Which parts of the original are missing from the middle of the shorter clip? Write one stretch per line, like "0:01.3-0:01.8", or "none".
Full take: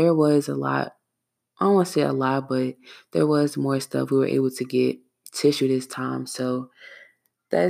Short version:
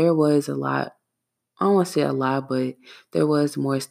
none